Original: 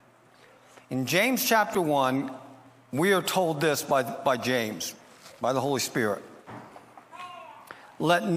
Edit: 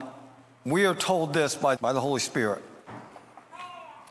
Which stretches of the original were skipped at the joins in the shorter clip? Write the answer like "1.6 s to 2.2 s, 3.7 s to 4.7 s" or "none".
4.0 s to 5.4 s